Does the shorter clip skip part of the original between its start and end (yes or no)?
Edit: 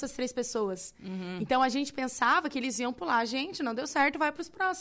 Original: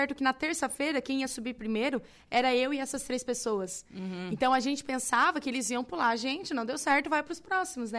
no